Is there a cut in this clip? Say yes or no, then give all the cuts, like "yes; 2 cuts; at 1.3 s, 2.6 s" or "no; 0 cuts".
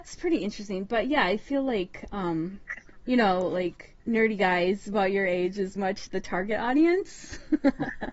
yes; 2 cuts; at 4.0 s, 5.8 s